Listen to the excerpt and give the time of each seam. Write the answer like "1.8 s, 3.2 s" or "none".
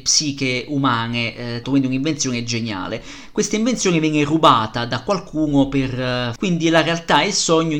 1.6 s, 6.4 s